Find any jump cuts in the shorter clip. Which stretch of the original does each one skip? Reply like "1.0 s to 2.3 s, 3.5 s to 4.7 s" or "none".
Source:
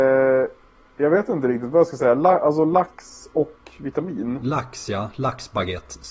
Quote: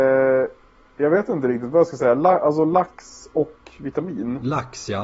none